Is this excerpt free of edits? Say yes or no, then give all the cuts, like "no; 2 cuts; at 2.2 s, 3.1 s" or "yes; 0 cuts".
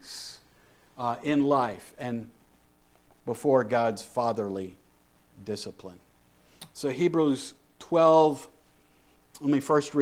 no; 1 cut; at 6.7 s